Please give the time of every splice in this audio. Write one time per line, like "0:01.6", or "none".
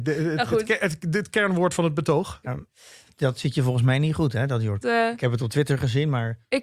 0:02.4
0:04.8